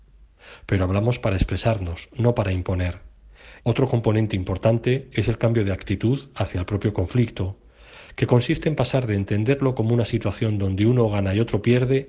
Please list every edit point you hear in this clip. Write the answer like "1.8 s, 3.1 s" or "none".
3.6 s